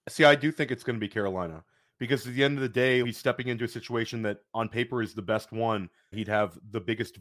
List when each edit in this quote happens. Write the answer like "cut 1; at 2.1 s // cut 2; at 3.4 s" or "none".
cut 1; at 3.0 s // cut 2; at 6.1 s